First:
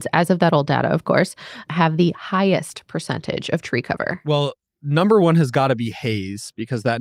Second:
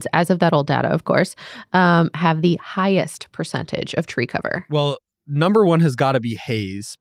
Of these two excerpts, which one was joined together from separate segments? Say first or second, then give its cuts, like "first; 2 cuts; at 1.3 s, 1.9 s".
first; 1 cut; at 1.7 s